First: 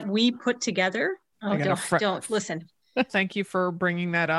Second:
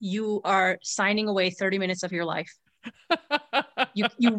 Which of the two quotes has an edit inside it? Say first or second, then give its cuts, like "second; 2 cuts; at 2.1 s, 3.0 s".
first; 2 cuts; at 1.3 s, 3.1 s